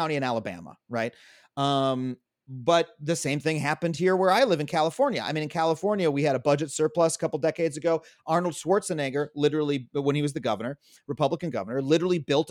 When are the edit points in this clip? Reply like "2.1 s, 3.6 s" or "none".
none